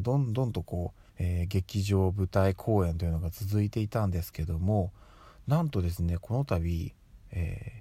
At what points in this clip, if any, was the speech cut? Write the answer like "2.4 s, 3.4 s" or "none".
1.1 s